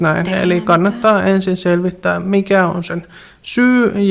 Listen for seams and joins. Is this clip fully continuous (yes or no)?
yes